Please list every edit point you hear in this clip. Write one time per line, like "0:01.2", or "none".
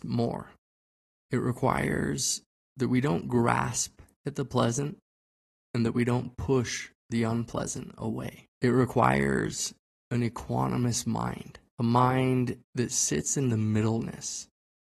0:08.5
0:11.7